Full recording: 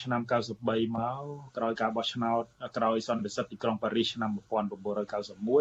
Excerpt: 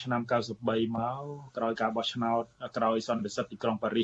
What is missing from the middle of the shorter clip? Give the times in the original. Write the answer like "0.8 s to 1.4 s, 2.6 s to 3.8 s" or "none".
none

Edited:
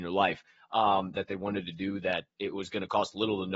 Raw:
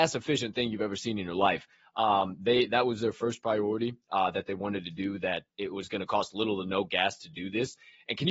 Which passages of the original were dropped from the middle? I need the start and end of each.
2.4 s to 4.3 s

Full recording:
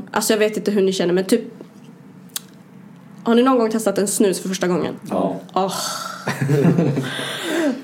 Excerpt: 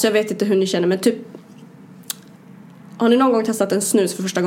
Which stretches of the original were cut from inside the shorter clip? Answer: none

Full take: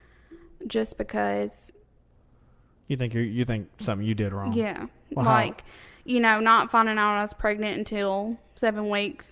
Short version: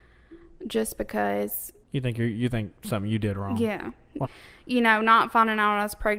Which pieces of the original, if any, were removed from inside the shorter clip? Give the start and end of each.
1.8 s to 2.8 s, 5.2 s to 5.6 s

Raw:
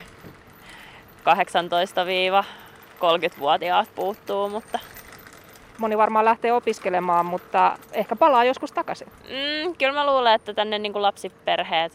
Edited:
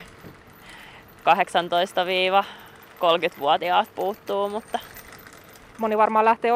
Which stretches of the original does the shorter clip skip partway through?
none

